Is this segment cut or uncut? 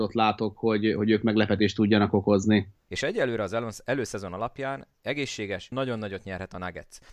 cut